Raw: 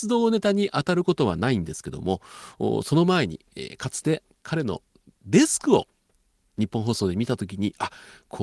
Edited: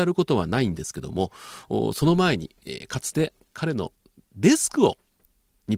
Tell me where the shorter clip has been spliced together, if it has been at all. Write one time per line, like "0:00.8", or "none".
none